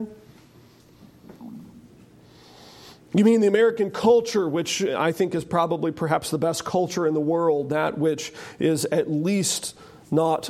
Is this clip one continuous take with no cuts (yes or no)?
yes